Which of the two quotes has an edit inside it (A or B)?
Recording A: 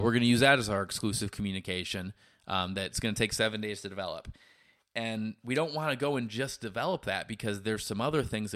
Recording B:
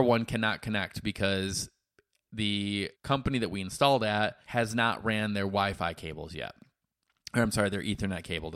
B